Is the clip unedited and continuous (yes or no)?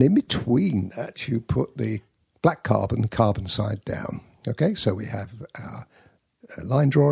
yes